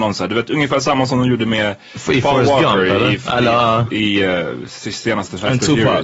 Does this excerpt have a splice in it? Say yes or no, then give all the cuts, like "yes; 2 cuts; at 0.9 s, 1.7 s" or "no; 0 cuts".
no; 0 cuts